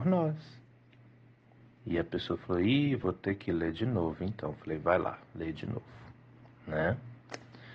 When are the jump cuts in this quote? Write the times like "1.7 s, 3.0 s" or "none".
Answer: none